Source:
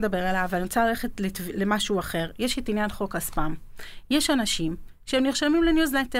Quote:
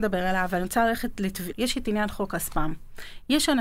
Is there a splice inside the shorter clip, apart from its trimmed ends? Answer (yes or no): yes